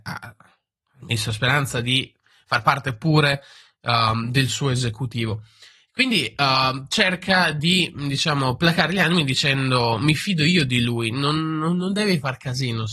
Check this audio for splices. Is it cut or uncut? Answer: uncut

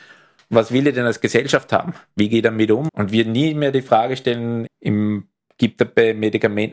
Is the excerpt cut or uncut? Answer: cut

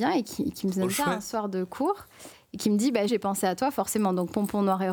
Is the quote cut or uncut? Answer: cut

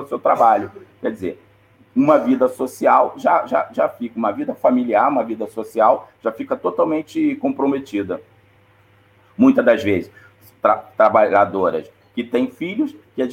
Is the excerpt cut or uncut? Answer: uncut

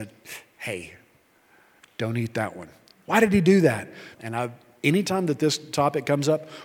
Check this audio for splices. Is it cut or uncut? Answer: cut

